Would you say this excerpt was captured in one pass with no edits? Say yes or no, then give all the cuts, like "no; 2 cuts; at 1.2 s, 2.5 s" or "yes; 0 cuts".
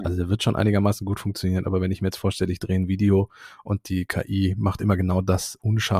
yes; 0 cuts